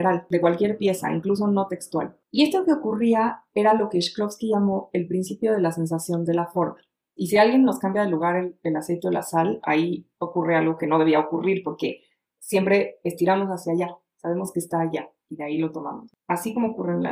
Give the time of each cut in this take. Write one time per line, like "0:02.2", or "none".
0:07.2